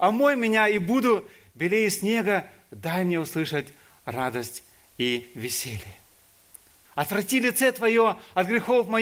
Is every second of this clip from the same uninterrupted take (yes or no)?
no